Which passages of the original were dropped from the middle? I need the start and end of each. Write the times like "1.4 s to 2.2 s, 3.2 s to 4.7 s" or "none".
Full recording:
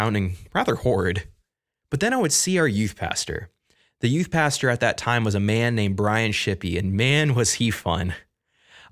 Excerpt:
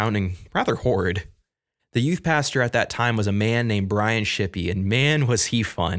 1.8 s to 3.9 s